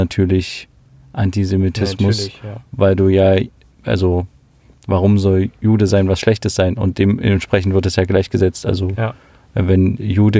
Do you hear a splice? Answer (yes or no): no